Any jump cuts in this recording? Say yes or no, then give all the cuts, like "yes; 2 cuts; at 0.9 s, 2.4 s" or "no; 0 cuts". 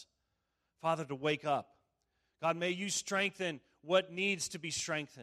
no; 0 cuts